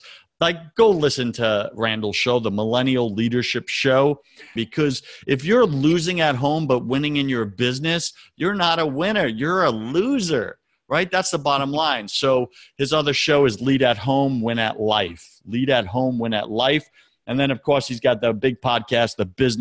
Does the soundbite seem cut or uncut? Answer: cut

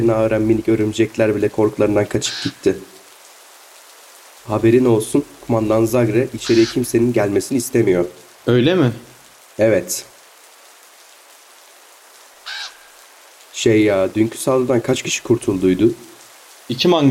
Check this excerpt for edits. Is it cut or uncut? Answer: uncut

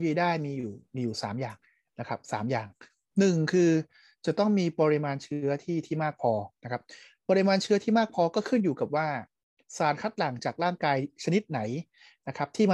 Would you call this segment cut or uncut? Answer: uncut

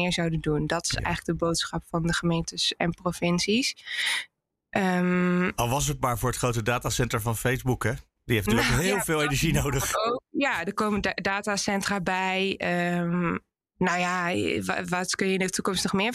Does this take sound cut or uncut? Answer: uncut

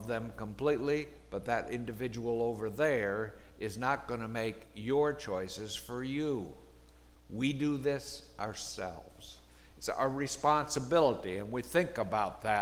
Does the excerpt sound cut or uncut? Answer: cut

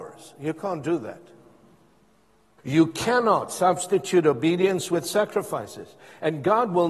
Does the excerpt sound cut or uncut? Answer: cut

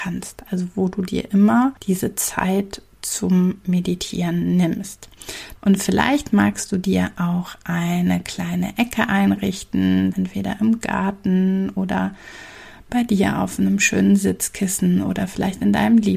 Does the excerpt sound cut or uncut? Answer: cut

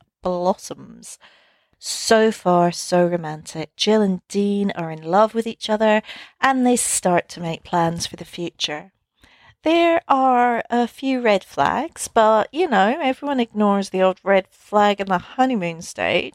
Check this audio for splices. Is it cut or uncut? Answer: uncut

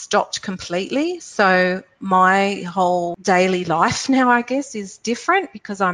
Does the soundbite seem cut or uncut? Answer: uncut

